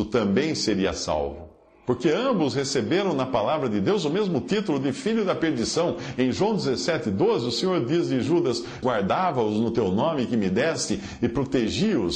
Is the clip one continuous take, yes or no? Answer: no